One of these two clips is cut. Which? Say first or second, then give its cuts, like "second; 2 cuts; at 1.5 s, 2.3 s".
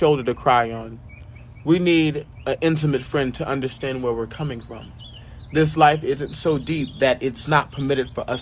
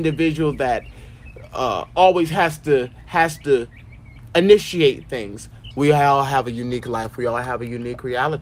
second; 1 cut; at 5.7 s